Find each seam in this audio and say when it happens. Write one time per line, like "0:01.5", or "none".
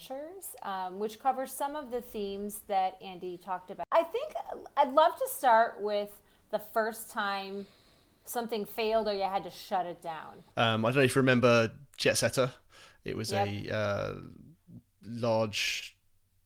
0:10.5